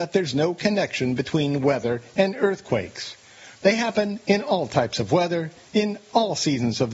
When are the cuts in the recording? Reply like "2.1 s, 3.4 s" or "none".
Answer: 3.5 s, 5.7 s

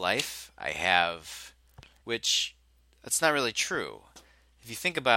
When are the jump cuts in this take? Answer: 2.0 s

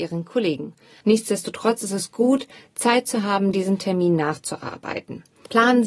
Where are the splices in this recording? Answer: 1.0 s

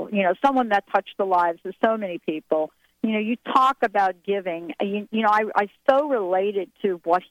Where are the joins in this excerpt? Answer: none

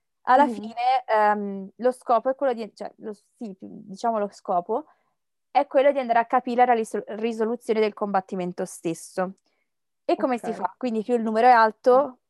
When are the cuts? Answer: 10.8 s

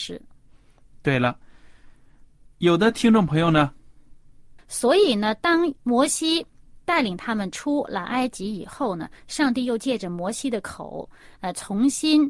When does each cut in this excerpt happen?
4.6 s, 5.8 s

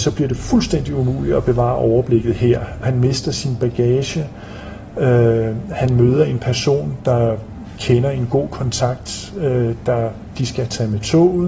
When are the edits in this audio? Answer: 2.8 s

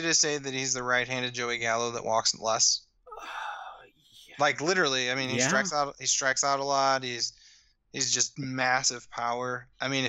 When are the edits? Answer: none

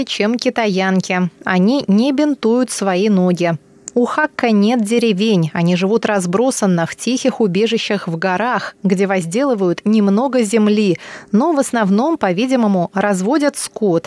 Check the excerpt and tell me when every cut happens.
none

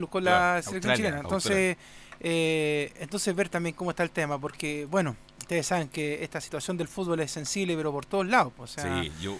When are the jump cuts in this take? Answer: none

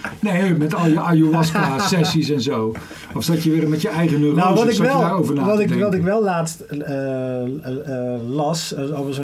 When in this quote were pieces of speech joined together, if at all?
none

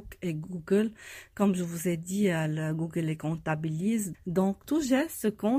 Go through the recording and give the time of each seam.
4.1 s

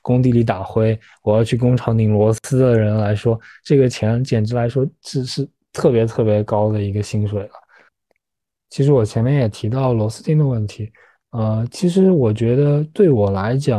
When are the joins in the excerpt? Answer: none

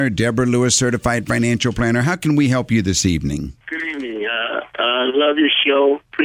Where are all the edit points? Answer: 3.6 s

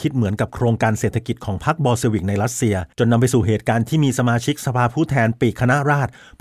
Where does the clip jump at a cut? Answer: 2.9 s

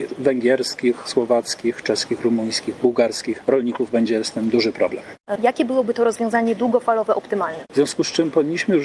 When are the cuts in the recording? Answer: 5.4 s, 7.7 s

